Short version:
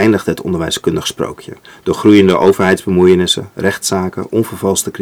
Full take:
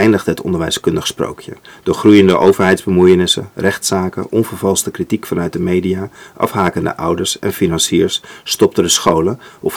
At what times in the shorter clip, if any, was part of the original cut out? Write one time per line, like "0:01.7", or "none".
none